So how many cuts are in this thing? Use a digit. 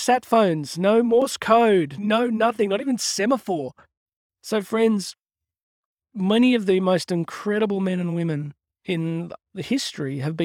1